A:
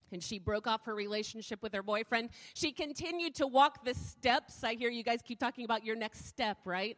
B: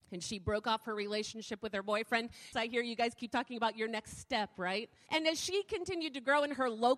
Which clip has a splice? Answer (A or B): B